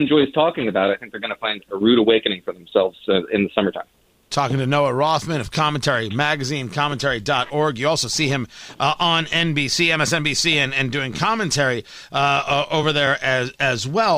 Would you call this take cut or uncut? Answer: uncut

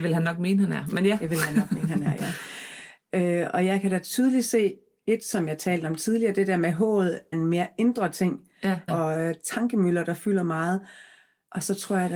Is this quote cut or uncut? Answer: cut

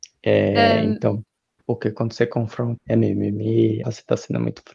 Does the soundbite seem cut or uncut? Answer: cut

